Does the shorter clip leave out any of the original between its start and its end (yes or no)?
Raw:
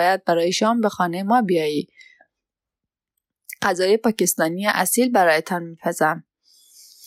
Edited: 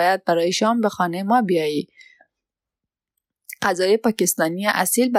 no